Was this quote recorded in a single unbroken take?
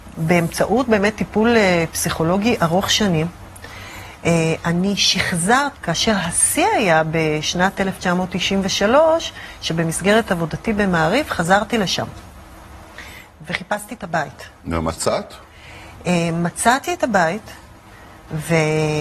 no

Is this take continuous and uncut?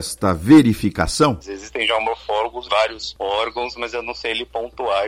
no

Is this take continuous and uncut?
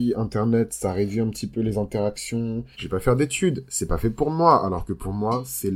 no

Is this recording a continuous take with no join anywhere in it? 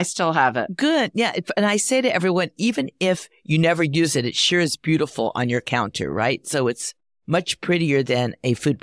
yes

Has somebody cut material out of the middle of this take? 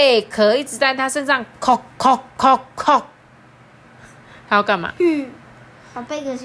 no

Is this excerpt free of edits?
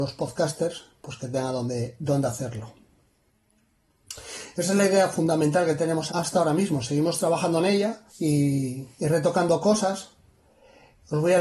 no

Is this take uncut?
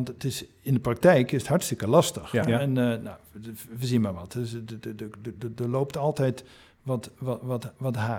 no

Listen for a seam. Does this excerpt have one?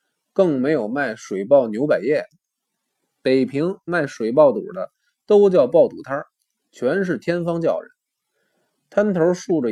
no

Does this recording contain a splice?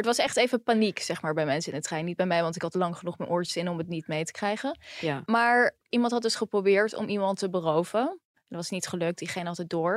no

